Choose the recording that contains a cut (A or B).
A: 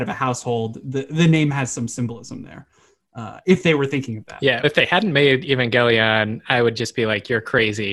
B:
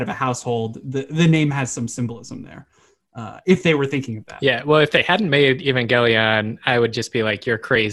A